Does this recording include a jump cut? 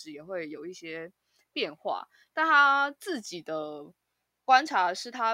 no; 0 cuts

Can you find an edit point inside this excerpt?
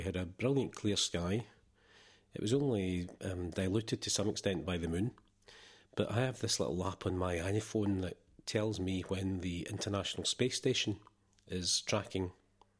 no; 0 cuts

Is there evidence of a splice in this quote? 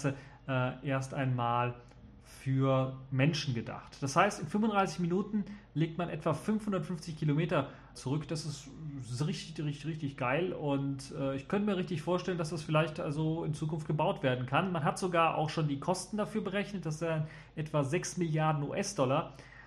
yes; 1 cut; at 7.9 s

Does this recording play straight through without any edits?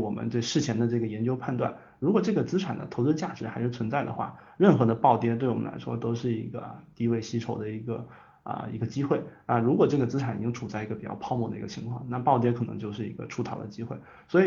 yes; 0 cuts

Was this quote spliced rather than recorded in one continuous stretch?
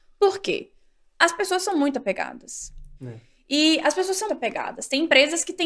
yes; 2 cuts; at 3.0 s, 4.3 s

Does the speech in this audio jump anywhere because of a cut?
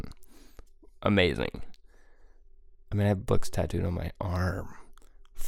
no; 0 cuts

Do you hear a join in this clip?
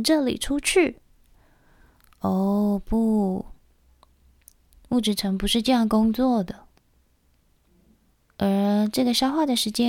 yes; 1 cut; at 8.2 s

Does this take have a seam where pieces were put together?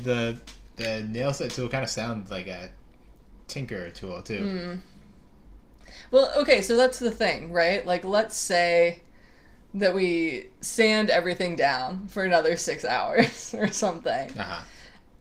no; 0 cuts

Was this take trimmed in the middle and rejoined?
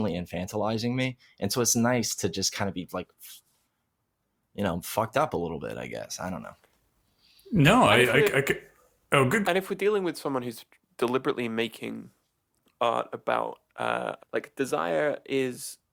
yes; 2 cuts; at 9.4 s, 14.2 s

